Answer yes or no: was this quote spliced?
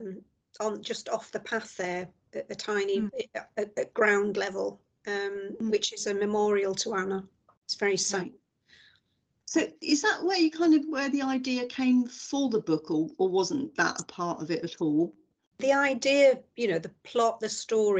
no